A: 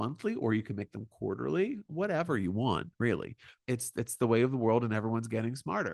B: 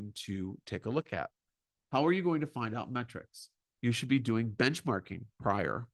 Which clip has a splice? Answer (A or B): A